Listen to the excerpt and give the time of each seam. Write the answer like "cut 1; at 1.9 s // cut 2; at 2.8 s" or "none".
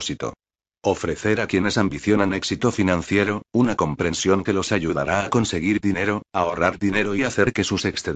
none

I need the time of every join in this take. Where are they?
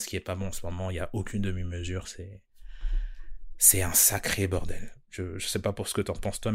none

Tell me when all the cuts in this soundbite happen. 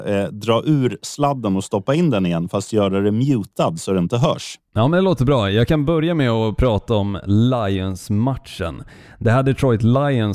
none

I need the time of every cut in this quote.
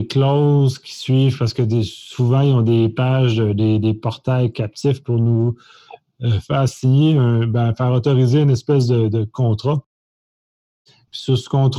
none

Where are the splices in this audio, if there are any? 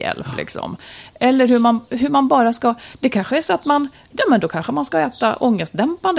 cut 1; at 4.1 s

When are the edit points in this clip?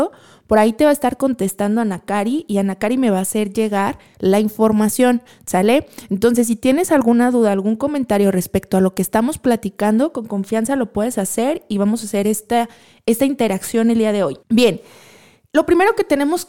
cut 1; at 14.4 s

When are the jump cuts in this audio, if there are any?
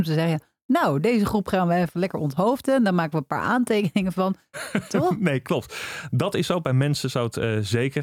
cut 1; at 4.5 s

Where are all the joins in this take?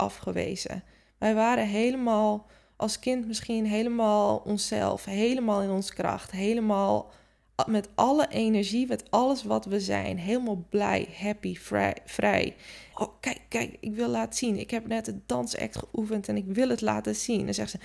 cut 1; at 12.9 s

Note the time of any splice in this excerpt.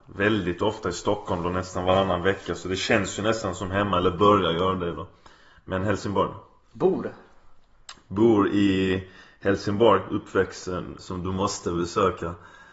cut 1; at 6.7 s // cut 2; at 11.0 s

